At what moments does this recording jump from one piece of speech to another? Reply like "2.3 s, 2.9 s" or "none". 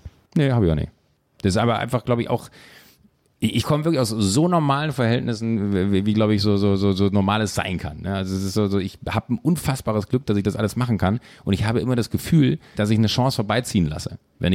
12.7 s